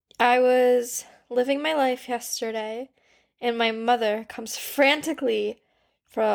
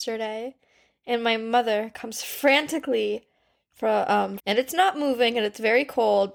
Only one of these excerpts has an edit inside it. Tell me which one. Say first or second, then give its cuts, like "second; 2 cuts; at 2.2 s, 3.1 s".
second; 1 cut; at 4.4 s